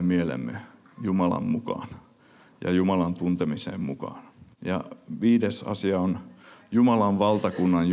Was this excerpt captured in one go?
no; 1 cut; at 4.5 s

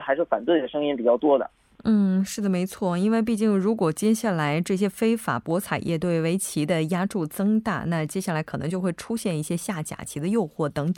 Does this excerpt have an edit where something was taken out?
no; 0 cuts

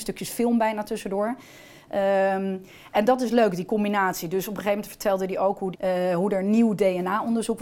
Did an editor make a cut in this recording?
yes; 1 cut; at 5.7 s

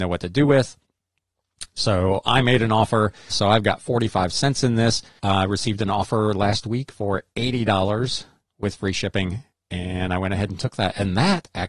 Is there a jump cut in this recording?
yes; 2 cuts; at 3.3 s, 5.2 s

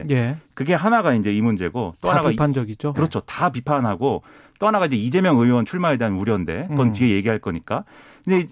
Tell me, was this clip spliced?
yes; 1 cut; at 2.9 s

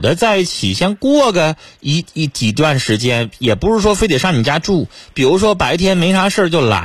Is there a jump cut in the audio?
no; 0 cuts

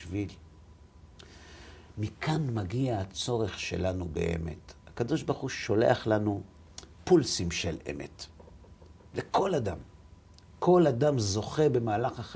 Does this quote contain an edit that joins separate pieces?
no; 0 cuts

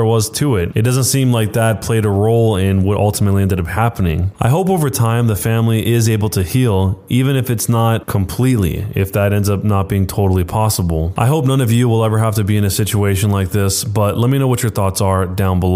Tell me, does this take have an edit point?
no; 0 cuts

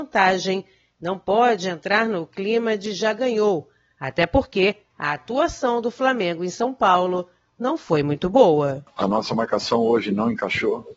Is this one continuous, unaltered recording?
yes; 0 cuts

